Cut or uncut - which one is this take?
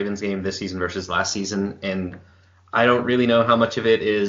uncut